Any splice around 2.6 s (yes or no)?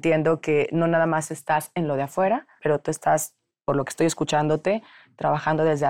yes